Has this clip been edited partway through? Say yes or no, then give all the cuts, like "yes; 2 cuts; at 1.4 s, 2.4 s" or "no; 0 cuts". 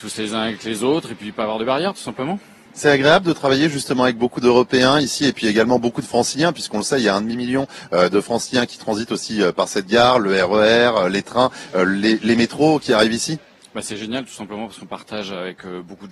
no; 0 cuts